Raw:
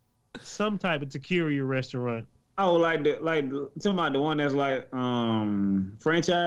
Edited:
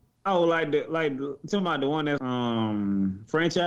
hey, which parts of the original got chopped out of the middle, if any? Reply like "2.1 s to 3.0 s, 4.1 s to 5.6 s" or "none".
4.5 s to 4.9 s